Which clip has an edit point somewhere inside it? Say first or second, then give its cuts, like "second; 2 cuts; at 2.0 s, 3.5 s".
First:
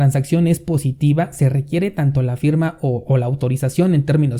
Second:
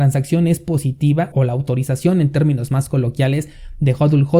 second; 1 cut; at 1.3 s